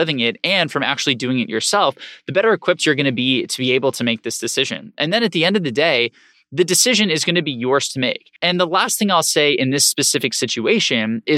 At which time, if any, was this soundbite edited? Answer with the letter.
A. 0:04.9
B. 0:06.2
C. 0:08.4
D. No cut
C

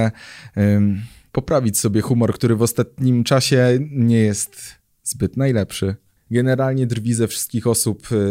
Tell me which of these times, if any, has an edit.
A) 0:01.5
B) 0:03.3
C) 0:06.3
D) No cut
C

